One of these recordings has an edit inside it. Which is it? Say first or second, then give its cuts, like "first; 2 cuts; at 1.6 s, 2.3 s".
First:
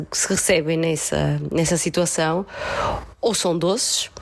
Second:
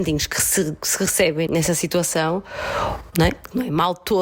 second; 2 cuts; at 1.5 s, 3.1 s